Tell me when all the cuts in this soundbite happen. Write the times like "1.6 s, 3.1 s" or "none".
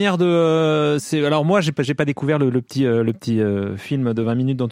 none